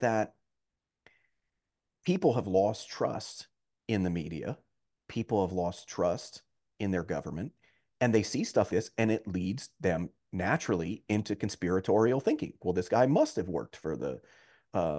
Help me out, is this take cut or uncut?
cut